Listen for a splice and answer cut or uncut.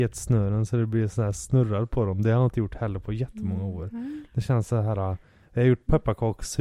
cut